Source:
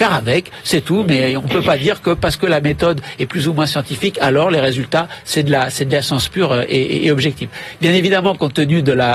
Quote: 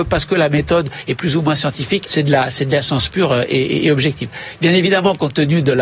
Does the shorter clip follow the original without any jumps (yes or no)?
no